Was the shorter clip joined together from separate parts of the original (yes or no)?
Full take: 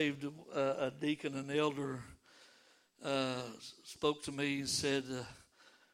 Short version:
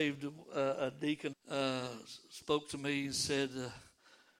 yes